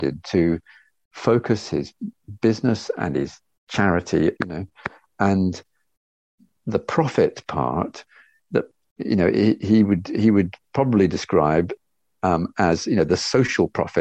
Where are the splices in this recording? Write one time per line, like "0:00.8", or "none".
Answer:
0:04.4